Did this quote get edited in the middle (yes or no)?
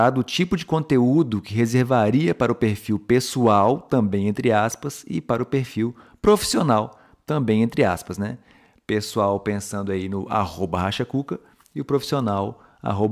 no